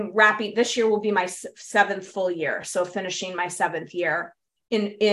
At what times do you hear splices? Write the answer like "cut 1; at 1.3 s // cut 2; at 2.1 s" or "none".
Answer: none